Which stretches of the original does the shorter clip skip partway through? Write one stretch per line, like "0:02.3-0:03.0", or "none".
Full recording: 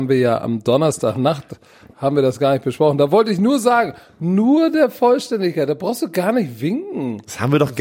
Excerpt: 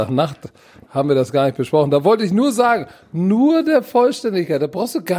none